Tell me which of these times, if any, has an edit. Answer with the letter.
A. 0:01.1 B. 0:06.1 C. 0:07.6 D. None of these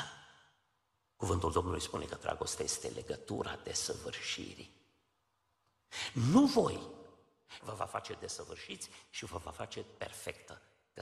C